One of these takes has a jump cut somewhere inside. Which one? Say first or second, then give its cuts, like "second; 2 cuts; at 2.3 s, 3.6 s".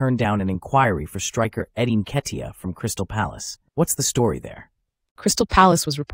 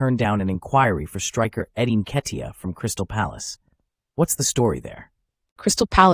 first; 1 cut; at 3.7 s